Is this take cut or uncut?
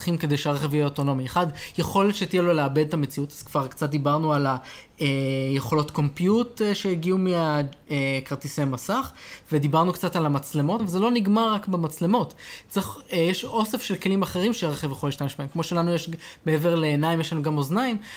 cut